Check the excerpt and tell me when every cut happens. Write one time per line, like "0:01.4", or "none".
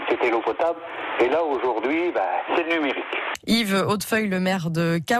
none